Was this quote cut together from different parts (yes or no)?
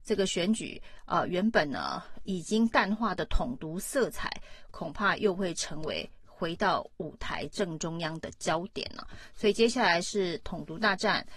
no